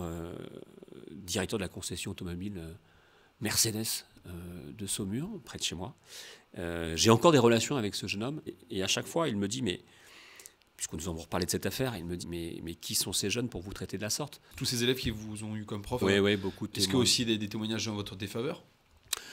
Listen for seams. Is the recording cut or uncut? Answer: cut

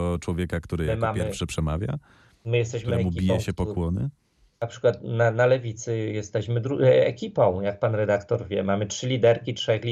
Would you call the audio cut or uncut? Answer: uncut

